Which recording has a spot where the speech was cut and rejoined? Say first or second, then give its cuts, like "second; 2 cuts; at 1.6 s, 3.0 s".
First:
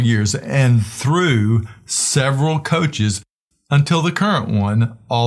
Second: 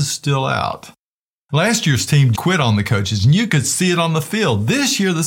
second; 1 cut; at 2.4 s